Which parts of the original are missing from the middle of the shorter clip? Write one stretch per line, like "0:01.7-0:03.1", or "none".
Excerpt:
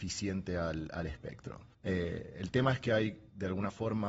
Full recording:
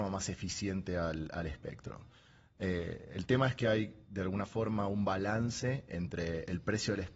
0:02.1-0:02.5